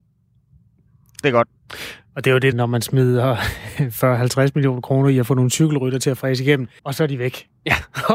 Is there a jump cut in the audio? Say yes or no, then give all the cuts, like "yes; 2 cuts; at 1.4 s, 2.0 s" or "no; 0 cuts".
yes; 2 cuts; at 2.5 s, 6.8 s